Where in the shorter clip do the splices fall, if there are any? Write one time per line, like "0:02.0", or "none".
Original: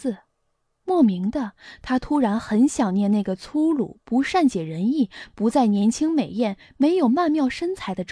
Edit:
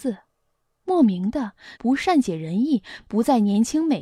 0:01.8